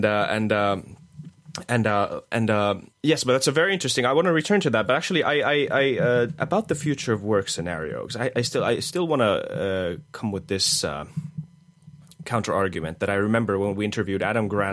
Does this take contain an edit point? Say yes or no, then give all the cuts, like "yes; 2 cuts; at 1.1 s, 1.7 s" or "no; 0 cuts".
yes; 1 cut; at 2.9 s